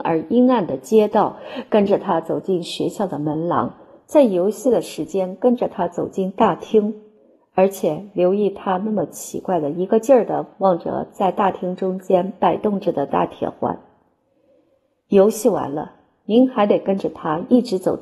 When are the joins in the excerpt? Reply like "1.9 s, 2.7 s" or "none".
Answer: none